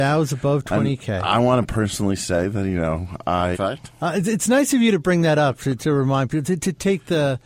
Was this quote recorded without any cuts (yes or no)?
no